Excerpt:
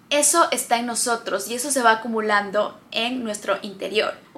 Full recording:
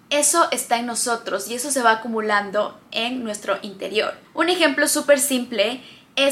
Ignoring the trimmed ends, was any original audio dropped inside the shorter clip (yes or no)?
no